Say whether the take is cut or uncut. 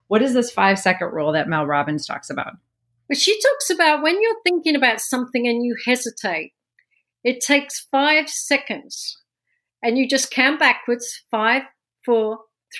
uncut